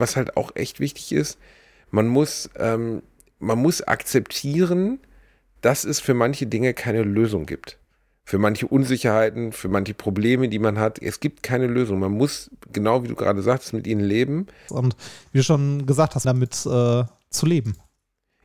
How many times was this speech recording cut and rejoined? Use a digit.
2